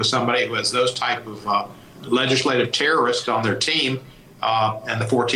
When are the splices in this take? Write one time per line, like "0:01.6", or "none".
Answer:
0:02.0